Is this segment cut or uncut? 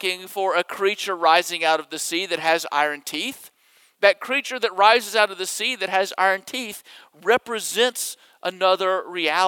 uncut